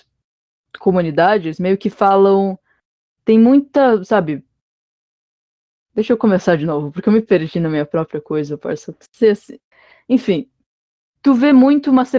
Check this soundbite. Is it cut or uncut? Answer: uncut